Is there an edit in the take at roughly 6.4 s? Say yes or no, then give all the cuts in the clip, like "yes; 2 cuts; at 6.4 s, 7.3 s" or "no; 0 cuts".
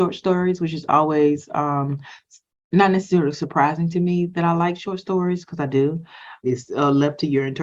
yes; 1 cut; at 6.4 s